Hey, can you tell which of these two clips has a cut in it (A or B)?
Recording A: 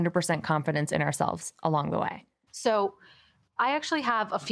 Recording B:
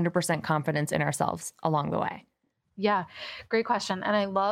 A